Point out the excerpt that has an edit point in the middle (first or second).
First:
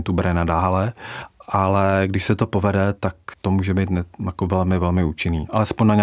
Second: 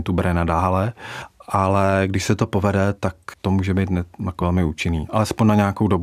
second